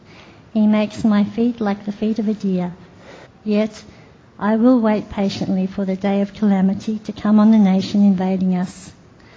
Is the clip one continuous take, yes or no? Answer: no